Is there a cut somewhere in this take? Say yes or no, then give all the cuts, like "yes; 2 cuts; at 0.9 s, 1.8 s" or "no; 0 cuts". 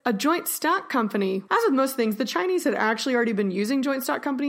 yes; 1 cut; at 1.5 s